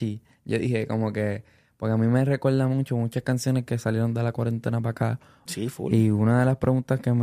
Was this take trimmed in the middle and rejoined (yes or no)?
yes